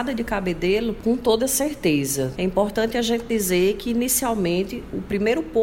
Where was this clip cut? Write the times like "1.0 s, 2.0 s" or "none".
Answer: 1.0 s, 2.4 s